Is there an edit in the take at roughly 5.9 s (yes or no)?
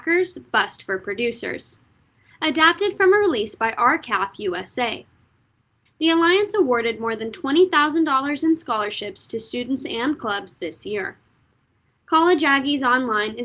yes